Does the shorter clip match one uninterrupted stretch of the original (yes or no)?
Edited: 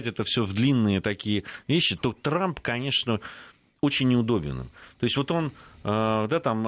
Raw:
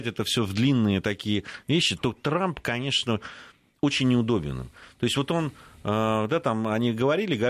yes